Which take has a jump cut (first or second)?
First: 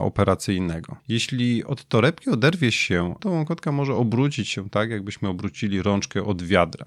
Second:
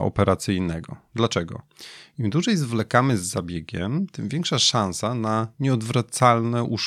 first